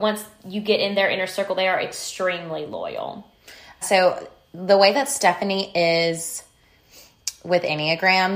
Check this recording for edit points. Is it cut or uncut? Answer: cut